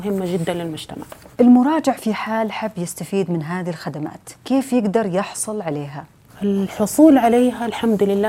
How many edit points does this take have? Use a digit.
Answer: 1